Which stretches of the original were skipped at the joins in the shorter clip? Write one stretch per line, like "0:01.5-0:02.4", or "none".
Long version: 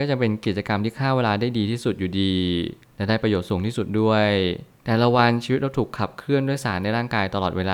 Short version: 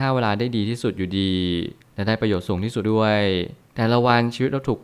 0:03.8-0:03.9